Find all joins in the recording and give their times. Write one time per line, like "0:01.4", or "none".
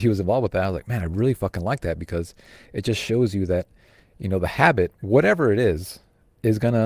none